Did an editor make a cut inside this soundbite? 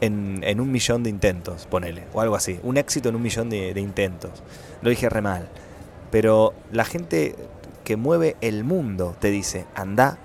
no; 0 cuts

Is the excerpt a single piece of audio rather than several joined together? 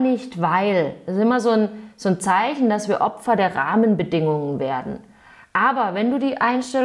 yes; 0 cuts

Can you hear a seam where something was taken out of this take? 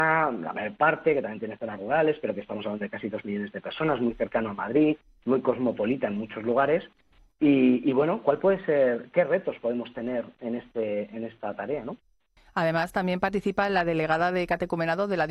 no; 0 cuts

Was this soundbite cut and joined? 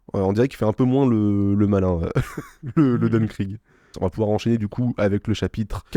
yes; 1 cut; at 3.9 s

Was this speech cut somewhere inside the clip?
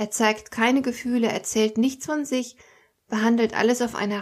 no; 0 cuts

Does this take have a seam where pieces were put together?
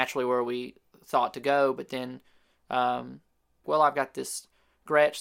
yes; 1 cut; at 3.6 s

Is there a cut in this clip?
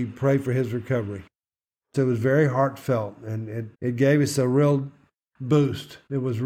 yes; 2 cuts; at 1.9 s, 3.7 s

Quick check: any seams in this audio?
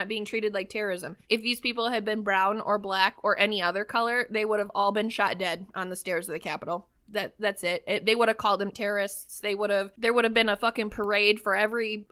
yes; 1 cut; at 1.2 s

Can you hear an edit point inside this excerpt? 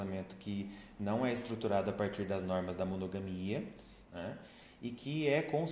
yes; 1 cut; at 4.1 s

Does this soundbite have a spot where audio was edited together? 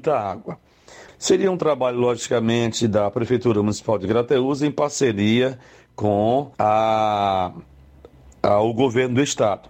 yes; 2 cuts; at 1.1 s, 6.5 s

